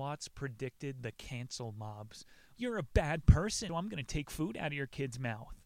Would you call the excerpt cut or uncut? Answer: cut